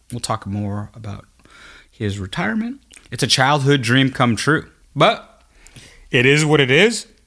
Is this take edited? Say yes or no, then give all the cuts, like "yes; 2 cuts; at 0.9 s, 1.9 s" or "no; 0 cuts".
yes; 2 cuts; at 3.0 s, 4.8 s